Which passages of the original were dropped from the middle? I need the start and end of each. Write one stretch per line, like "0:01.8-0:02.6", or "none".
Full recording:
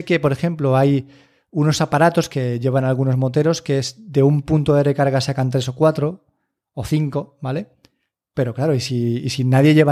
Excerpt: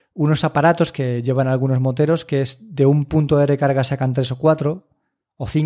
none

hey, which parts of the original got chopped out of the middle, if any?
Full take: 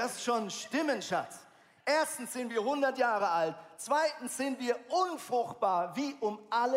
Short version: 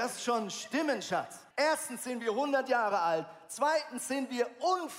0:01.5-0:01.8

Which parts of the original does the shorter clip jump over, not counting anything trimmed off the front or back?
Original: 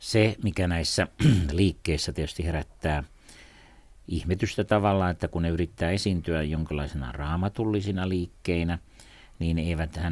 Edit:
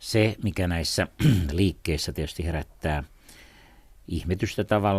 none

